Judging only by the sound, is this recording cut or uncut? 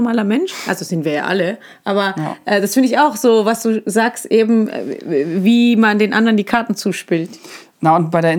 uncut